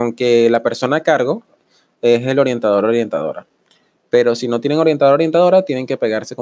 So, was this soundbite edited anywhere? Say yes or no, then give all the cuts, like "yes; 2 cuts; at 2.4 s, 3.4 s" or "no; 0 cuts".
no; 0 cuts